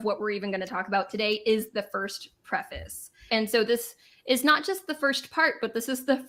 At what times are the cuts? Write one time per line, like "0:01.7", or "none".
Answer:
0:03.3